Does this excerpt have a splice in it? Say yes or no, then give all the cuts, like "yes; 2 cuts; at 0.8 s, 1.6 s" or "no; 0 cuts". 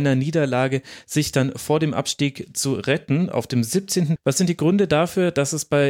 yes; 1 cut; at 4.2 s